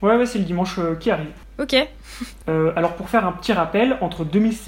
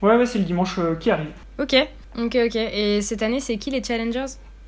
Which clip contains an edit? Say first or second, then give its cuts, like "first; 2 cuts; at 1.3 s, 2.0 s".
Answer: second; 1 cut; at 2.0 s